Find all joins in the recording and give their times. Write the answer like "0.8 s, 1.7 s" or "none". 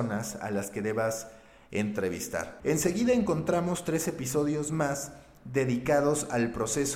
2.6 s